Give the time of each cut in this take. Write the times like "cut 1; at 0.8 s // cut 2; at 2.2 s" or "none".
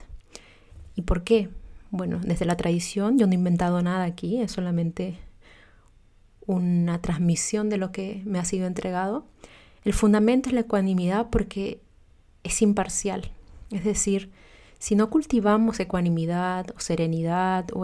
none